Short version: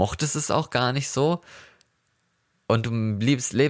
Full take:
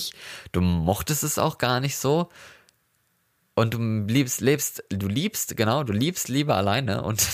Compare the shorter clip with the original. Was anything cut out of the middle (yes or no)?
no